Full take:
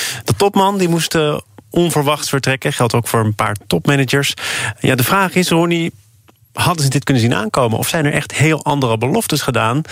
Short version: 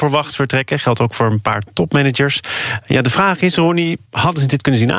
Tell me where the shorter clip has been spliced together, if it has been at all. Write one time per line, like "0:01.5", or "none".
0:04.0